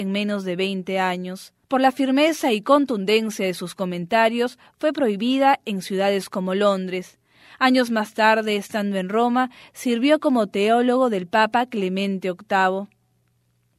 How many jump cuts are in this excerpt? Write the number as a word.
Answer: one